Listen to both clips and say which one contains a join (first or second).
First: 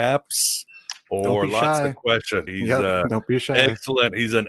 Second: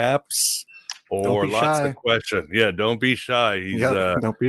first